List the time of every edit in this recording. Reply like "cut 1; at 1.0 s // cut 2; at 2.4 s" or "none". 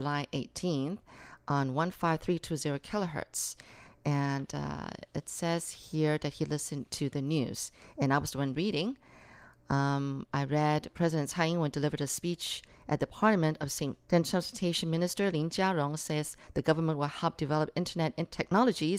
cut 1; at 14.1 s